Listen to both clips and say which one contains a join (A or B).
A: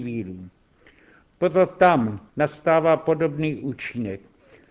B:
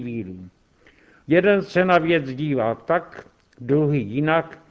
A